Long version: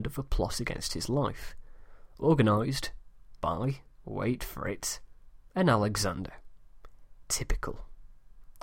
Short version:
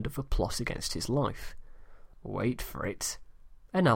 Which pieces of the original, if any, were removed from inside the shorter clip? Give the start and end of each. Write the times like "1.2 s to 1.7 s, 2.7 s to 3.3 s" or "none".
2.1 s to 4.0 s